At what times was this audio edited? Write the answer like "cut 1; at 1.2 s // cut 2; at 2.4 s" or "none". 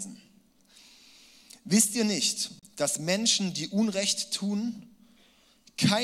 none